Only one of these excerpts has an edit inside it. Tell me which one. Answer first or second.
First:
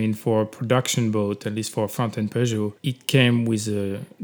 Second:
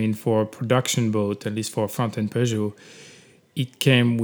first